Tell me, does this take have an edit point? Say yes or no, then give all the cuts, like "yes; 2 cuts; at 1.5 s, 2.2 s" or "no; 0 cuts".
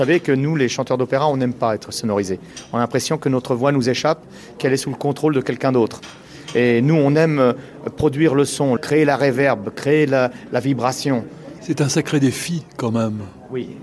yes; 2 cuts; at 8.8 s, 11.6 s